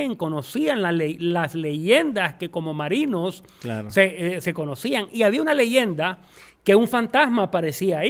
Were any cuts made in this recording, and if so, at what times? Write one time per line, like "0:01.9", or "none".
none